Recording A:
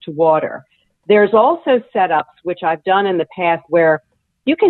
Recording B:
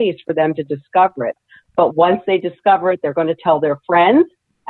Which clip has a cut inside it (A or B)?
A